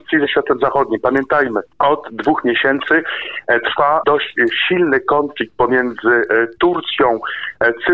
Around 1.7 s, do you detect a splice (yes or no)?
yes